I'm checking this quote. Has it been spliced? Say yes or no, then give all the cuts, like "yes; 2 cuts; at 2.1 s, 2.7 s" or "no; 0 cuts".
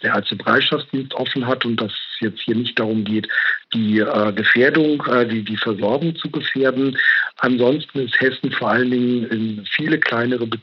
no; 0 cuts